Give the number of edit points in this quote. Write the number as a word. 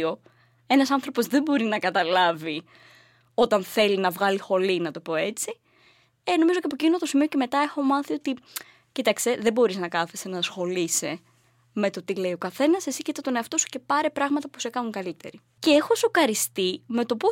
one